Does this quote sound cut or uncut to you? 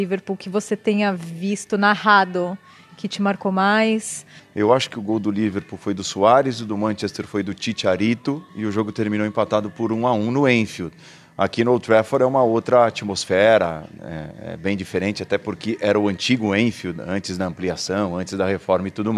cut